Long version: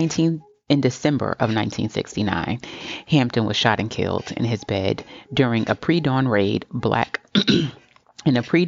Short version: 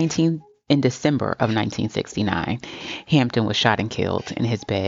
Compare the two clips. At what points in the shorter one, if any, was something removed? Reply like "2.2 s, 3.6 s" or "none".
none